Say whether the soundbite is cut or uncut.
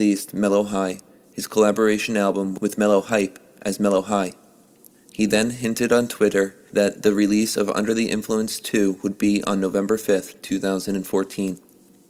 cut